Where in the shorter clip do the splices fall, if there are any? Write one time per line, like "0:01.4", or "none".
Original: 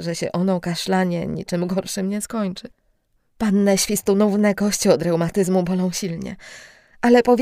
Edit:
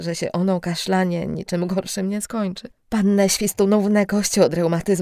0:02.8